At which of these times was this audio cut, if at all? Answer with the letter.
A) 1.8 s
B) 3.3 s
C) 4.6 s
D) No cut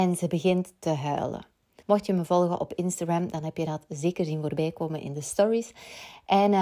A